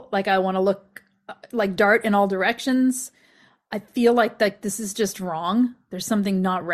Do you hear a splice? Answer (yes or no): no